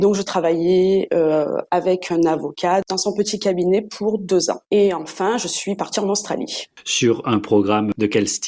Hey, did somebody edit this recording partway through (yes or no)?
no